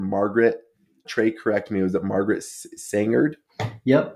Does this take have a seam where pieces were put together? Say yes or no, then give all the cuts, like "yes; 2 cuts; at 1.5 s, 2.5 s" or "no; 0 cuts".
yes; 1 cut; at 1.0 s